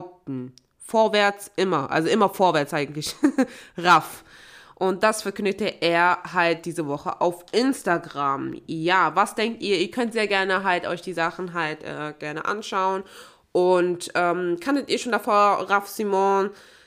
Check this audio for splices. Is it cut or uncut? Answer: uncut